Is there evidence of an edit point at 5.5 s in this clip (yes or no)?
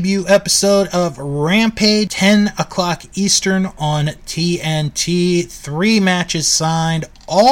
no